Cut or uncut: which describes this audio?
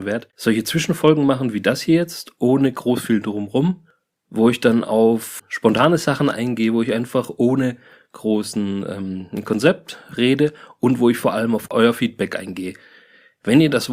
cut